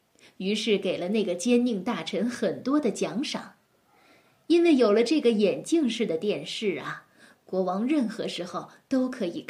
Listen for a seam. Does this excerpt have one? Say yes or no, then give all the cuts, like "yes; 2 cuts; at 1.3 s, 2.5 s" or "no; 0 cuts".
no; 0 cuts